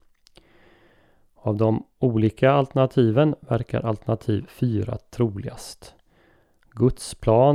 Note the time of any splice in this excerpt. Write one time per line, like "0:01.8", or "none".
none